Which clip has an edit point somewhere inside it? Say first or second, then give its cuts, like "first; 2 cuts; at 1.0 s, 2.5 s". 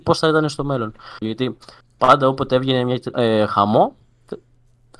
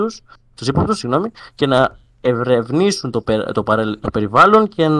first; 2 cuts; at 1.2 s, 3.1 s